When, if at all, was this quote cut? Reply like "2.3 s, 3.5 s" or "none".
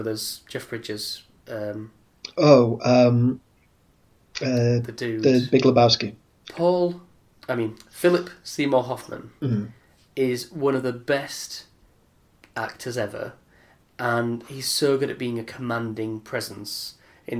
6.4 s